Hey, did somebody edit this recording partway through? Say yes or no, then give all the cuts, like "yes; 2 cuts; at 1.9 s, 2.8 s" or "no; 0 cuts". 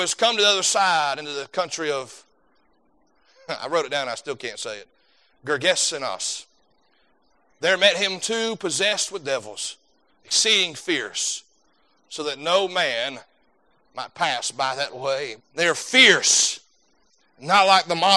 yes; 3 cuts; at 7.5 s, 10.1 s, 15.4 s